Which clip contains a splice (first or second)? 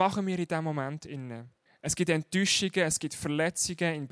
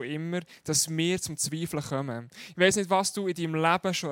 first